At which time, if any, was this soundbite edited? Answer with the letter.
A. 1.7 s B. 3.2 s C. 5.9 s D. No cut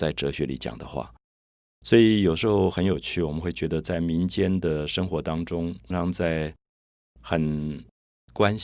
C